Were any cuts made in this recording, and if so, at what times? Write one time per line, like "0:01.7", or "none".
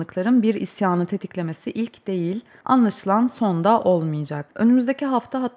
0:04.5